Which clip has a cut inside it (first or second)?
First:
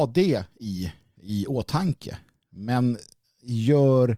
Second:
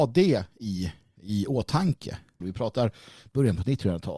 second